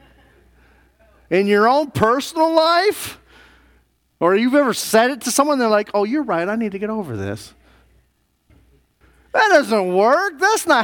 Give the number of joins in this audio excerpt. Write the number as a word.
zero